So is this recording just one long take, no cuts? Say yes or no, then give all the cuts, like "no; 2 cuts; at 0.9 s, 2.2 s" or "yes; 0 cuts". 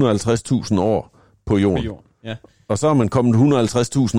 yes; 0 cuts